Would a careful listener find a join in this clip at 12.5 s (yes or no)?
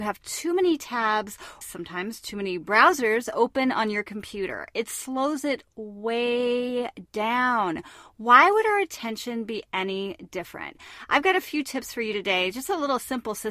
no